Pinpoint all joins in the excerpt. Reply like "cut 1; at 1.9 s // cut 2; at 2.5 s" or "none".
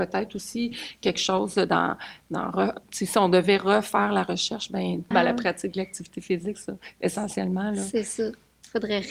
cut 1; at 5.1 s